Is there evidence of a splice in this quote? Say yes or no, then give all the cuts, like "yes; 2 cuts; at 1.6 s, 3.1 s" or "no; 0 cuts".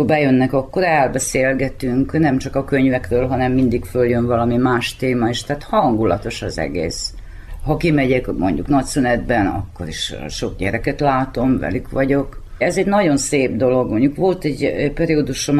no; 0 cuts